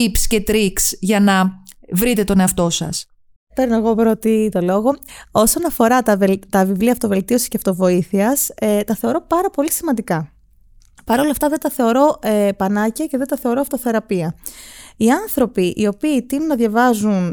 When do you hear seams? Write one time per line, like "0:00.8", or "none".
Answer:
0:03.4

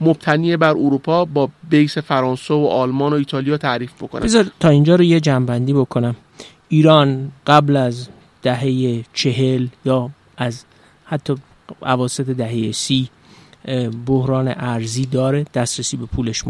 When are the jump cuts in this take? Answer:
0:07.4

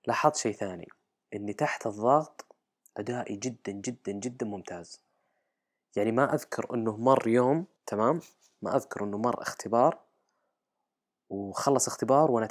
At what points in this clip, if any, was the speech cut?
0:07.8

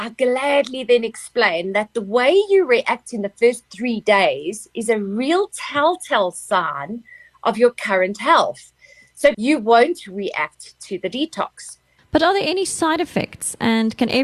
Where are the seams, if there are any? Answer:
0:09.3
0:12.0

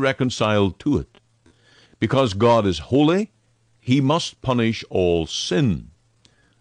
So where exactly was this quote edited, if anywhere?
none

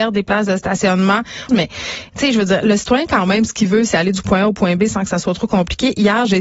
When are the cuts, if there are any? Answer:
0:01.5

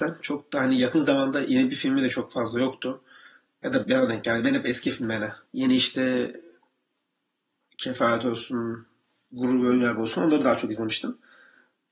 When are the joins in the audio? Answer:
0:03.8
0:05.5

